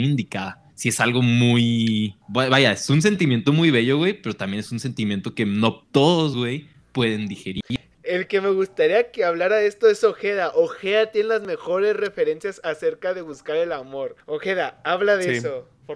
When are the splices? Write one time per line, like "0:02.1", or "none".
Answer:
none